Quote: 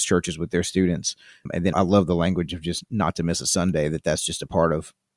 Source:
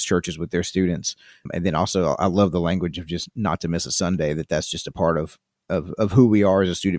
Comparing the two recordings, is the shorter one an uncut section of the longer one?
no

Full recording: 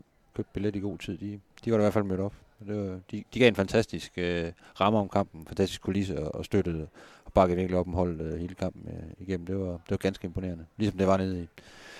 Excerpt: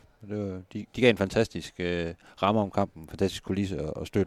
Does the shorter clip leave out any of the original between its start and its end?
no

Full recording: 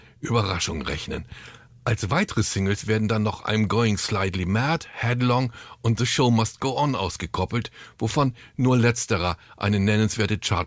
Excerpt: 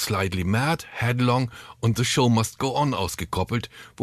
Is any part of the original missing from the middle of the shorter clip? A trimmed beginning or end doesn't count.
no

